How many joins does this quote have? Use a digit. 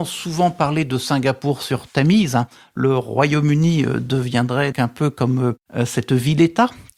1